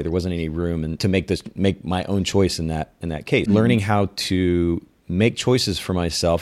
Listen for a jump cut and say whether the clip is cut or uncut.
cut